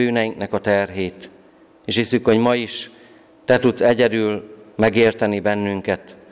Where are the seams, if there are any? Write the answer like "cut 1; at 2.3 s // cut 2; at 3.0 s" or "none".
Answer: none